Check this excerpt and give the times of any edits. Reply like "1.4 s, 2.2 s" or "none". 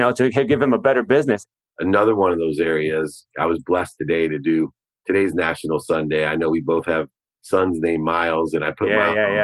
1.6 s